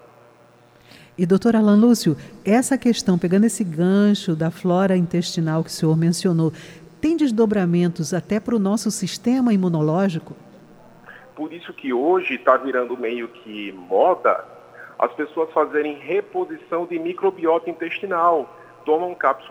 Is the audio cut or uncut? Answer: cut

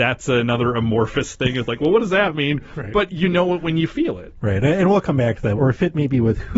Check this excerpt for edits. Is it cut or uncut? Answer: cut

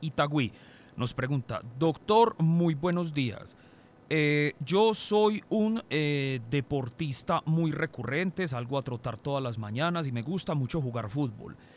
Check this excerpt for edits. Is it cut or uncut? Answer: uncut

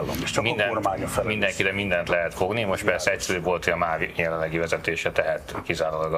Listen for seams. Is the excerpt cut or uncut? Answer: uncut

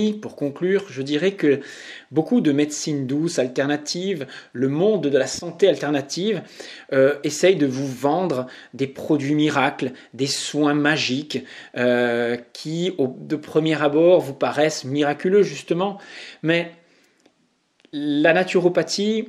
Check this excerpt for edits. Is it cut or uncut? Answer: uncut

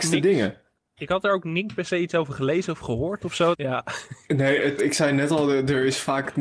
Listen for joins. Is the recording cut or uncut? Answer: cut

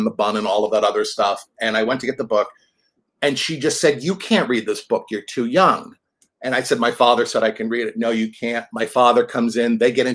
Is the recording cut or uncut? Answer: uncut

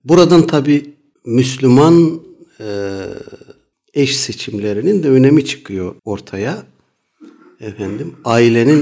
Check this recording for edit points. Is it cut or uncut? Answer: cut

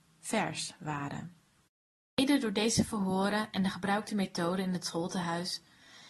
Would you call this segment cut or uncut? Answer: uncut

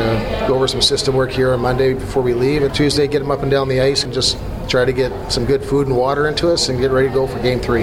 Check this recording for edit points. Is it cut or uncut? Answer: cut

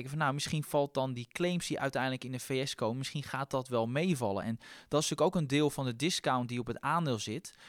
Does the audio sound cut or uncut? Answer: uncut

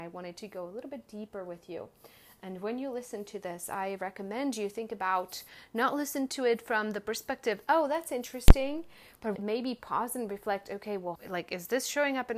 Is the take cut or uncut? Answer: cut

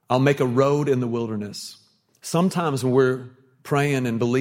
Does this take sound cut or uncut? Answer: uncut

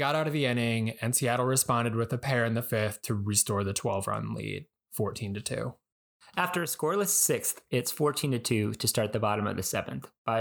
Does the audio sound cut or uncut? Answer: uncut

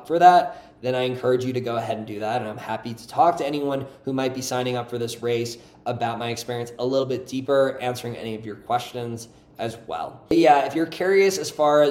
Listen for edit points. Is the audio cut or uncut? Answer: uncut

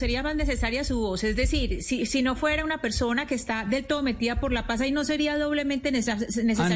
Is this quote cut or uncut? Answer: uncut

